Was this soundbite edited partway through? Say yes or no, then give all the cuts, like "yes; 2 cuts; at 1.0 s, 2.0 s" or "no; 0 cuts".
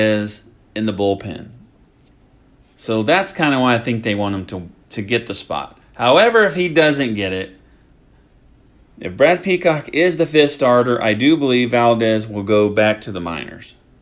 no; 0 cuts